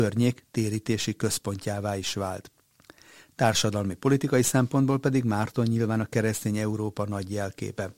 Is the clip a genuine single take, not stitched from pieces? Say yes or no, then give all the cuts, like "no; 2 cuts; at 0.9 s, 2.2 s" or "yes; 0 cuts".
yes; 0 cuts